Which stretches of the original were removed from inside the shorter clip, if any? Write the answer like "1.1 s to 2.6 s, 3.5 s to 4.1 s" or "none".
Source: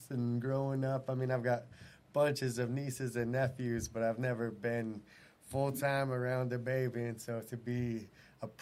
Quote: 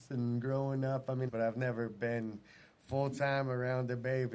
1.3 s to 3.9 s